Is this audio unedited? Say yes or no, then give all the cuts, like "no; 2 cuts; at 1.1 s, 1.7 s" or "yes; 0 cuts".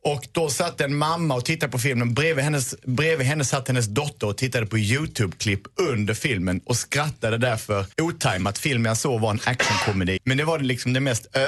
no; 2 cuts; at 7.9 s, 10.2 s